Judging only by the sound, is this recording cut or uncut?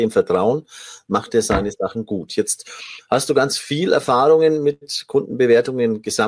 uncut